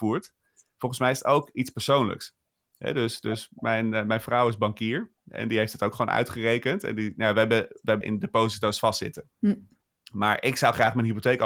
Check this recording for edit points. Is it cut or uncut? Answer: cut